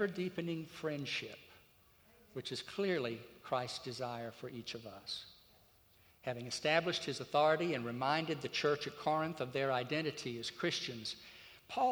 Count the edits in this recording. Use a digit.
1